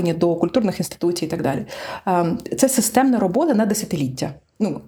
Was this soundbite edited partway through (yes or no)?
no